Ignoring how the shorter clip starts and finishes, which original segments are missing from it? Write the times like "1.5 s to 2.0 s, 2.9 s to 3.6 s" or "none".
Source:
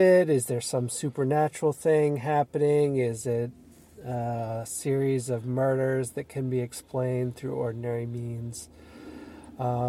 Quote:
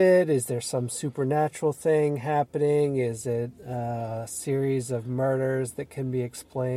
3.6 s to 3.9 s